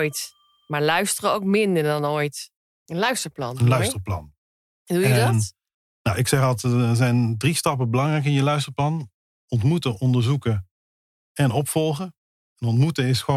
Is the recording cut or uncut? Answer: cut